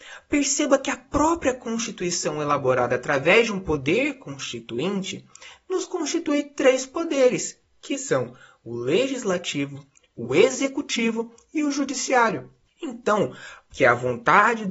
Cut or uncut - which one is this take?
cut